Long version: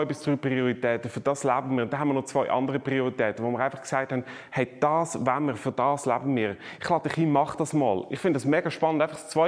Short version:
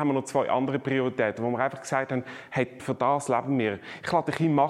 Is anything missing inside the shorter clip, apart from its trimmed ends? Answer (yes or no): yes